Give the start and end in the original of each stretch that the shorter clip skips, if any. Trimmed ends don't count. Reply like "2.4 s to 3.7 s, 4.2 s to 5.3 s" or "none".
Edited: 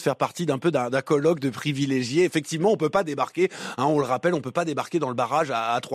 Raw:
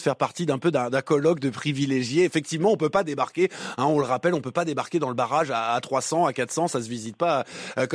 none